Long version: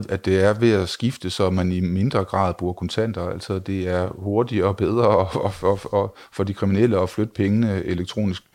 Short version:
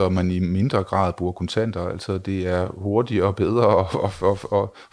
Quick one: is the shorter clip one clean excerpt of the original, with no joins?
yes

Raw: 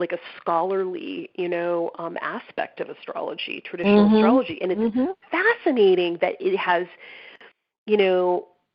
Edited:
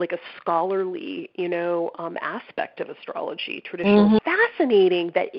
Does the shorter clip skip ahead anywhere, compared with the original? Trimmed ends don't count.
yes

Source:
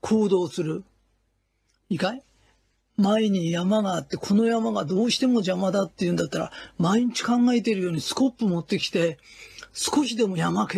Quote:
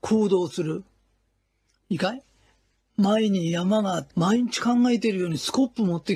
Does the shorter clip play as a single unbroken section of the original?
no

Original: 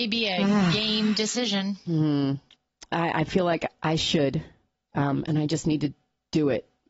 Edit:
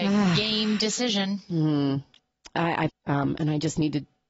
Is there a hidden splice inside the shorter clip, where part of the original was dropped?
yes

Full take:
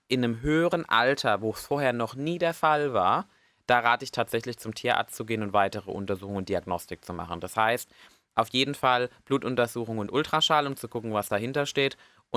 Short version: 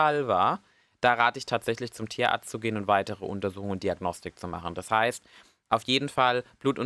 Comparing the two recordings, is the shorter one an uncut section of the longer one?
yes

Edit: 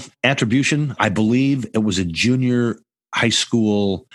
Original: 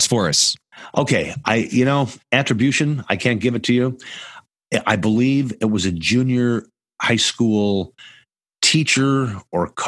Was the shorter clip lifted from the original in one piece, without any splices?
no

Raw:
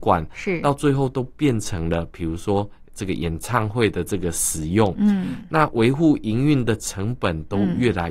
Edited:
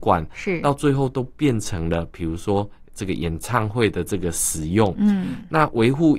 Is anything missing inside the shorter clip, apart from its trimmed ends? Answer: no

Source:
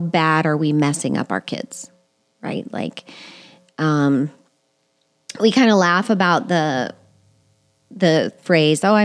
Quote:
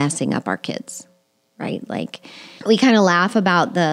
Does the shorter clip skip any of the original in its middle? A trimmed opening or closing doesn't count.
yes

